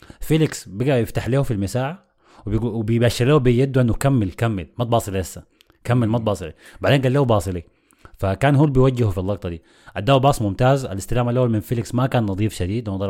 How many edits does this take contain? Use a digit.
0